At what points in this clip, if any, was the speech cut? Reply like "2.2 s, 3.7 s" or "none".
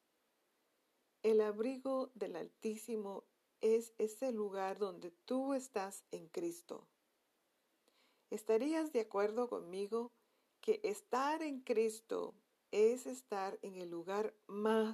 none